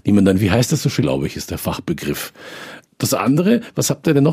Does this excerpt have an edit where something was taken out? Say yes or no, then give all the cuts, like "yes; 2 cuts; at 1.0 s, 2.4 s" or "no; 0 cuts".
yes; 2 cuts; at 1.0 s, 2.9 s